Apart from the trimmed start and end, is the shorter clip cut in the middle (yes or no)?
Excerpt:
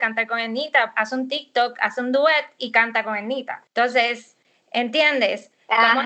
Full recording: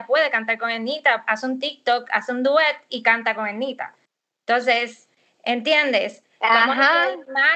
yes